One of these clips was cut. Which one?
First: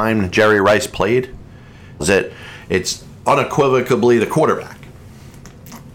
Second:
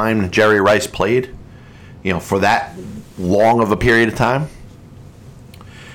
first; 1 cut; at 2.0 s

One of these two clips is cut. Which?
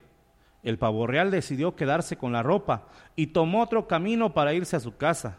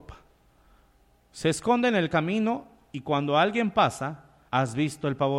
second; 1 cut; at 4.5 s

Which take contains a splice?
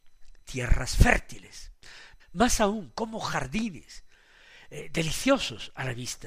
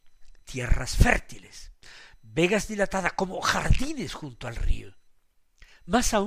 first; 1 cut; at 2.2 s

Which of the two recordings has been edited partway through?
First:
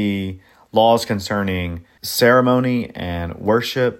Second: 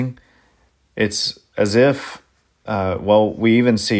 first; 1 cut; at 2.0 s

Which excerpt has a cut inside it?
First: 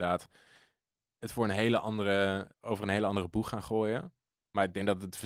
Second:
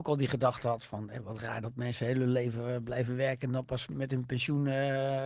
first; 1 cut; at 2.5 s

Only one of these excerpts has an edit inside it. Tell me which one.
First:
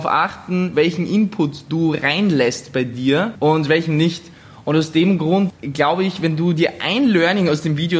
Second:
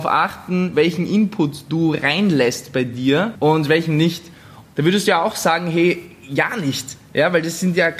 second; 1 cut; at 4.6 s

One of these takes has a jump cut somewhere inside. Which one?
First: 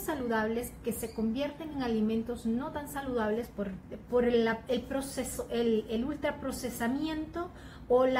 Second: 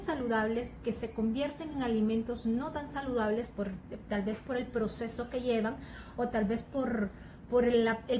first; 1 cut; at 4.1 s

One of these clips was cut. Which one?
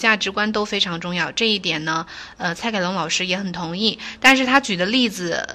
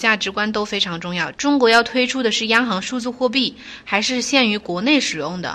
second; 1 cut; at 1.3 s

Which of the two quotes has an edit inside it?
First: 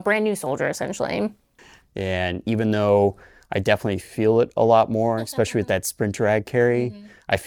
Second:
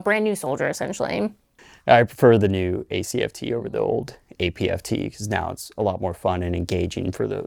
first; 1 cut; at 1.8 s

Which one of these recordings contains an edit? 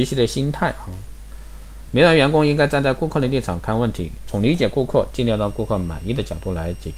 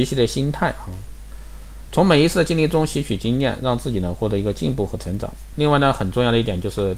first; 1 cut; at 1.9 s

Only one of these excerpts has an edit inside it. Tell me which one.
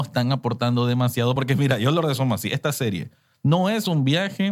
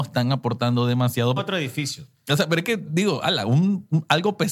second; 1 cut; at 1.4 s

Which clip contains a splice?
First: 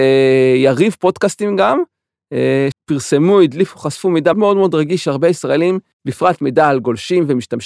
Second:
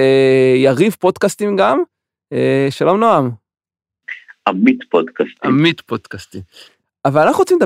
first; 2 cuts; at 2.7 s, 4.3 s

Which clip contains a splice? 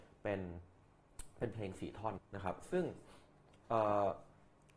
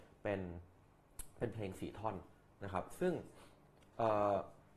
first; 1 cut; at 2.2 s

